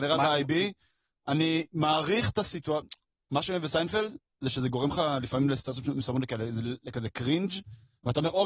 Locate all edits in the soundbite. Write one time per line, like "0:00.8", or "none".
none